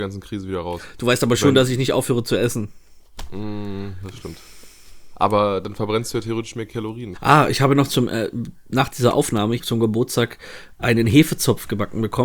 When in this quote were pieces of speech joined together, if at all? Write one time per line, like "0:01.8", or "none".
0:04.0
0:07.1
0:09.6